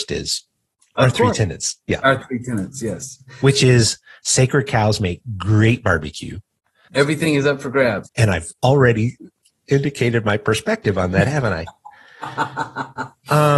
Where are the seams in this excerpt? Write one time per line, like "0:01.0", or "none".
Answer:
0:06.9
0:08.1